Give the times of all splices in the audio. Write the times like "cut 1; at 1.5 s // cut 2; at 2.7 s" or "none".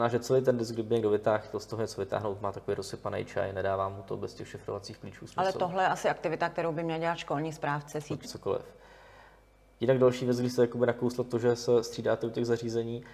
cut 1; at 8.2 s